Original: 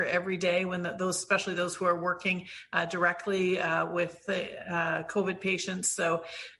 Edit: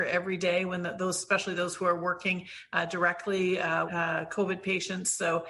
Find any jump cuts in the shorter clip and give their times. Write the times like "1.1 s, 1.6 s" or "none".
3.9 s